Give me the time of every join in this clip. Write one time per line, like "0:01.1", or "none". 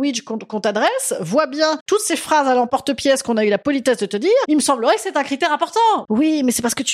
0:04.5
0:06.0

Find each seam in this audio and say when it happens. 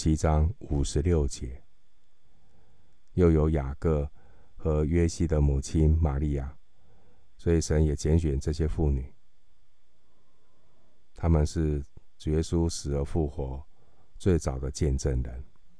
0:03.1
0:07.4

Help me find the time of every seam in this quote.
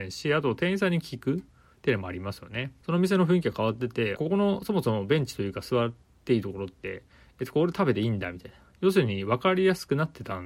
0:02.8
0:04.2

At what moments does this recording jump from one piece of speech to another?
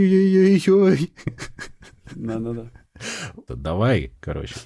0:03.5

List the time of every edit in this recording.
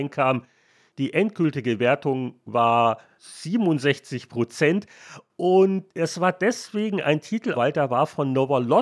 0:05.9
0:07.5

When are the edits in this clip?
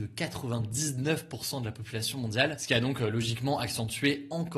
none

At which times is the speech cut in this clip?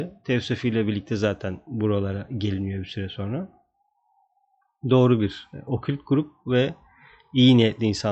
none

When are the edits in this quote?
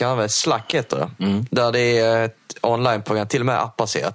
none

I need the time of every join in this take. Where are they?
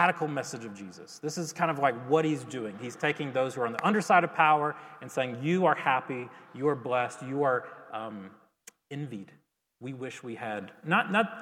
none

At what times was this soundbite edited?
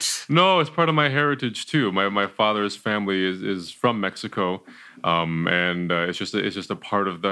none

